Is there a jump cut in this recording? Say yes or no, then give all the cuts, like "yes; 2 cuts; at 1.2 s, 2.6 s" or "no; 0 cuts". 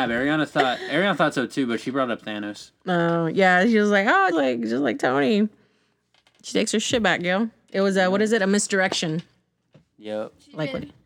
yes; 1 cut; at 4.3 s